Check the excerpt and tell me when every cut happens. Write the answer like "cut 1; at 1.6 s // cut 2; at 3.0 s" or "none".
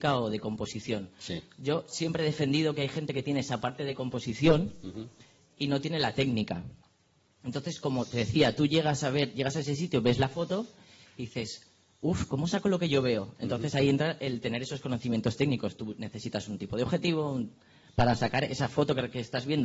cut 1; at 12.3 s